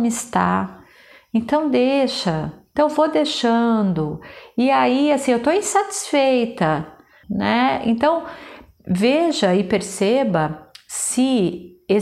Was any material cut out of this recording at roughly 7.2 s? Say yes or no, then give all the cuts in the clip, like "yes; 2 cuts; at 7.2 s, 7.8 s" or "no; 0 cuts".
yes; 1 cut; at 7.2 s